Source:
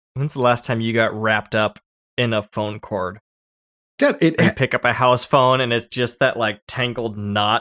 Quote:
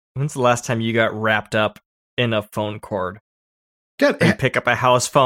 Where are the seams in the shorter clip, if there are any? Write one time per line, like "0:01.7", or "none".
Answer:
0:04.2

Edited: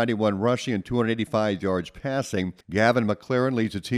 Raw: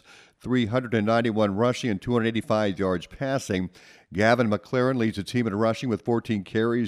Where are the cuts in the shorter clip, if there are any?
0:02.6

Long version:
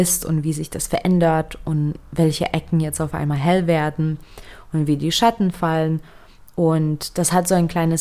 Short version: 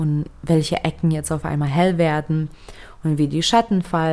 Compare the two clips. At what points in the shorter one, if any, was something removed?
none

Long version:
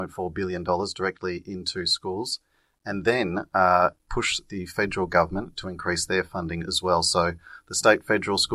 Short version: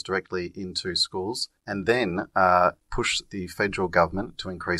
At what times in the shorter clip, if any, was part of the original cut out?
0:01.6

